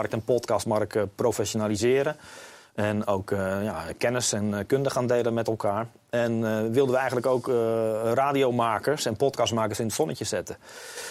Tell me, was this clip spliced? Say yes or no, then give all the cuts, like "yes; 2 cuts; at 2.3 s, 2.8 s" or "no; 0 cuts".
no; 0 cuts